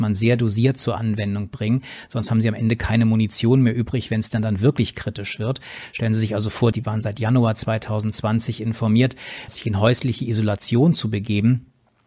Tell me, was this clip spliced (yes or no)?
yes